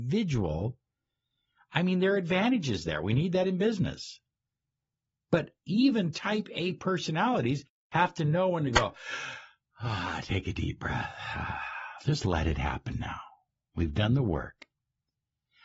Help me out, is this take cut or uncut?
uncut